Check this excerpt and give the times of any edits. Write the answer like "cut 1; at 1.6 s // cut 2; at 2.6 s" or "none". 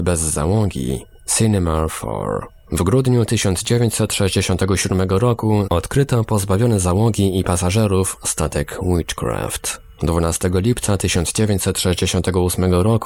cut 1; at 5.7 s